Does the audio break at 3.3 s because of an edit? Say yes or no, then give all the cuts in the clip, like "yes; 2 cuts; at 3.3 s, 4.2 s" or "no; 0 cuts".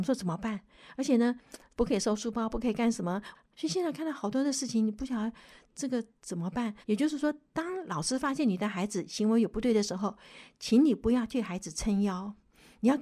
yes; 2 cuts; at 3.3 s, 6.8 s